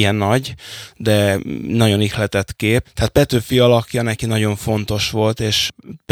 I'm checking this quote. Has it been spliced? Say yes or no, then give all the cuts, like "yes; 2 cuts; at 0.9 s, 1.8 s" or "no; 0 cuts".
yes; 1 cut; at 2.8 s